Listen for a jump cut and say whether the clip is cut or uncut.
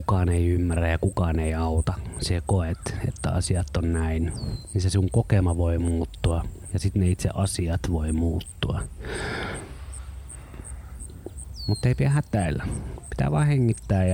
uncut